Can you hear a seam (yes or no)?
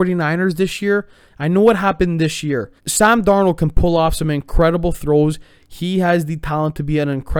yes